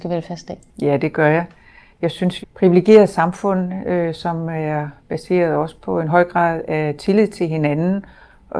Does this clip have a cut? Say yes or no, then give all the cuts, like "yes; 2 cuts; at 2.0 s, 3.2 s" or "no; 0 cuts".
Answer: yes; 2 cuts; at 2.4 s, 5.0 s